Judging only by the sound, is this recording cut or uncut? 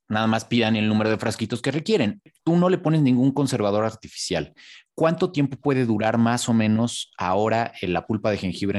uncut